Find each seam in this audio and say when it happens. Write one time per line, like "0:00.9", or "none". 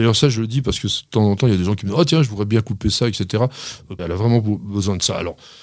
0:04.0